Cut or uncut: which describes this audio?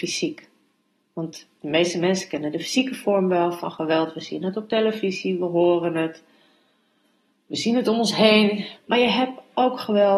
cut